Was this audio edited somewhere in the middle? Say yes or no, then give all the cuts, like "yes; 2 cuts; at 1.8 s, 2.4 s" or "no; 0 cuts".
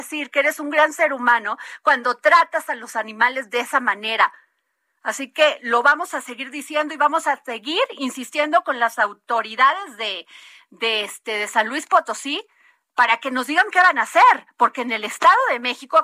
no; 0 cuts